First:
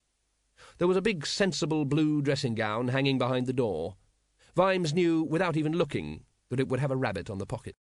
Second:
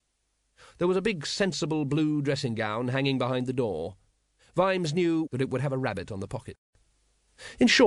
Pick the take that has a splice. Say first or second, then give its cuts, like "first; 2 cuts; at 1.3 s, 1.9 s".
second; 1 cut; at 5.2 s